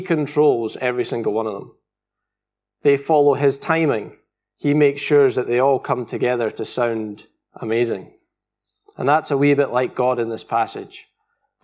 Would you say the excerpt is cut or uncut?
uncut